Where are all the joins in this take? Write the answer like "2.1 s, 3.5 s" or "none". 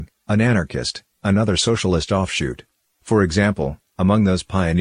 2.9 s